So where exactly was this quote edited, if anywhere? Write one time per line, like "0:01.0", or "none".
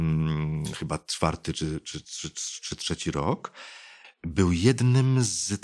0:04.0

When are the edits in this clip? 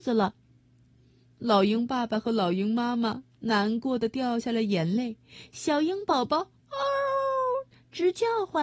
none

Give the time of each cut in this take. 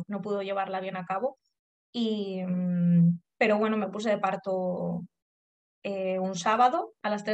none

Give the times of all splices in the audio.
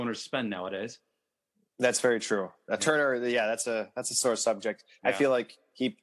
none

